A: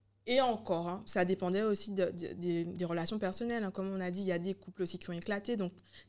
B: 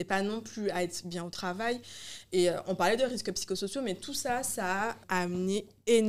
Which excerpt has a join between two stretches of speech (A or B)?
B